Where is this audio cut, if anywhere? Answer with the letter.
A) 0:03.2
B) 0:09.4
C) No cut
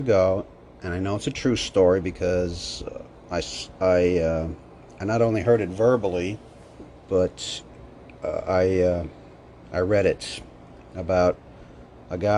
C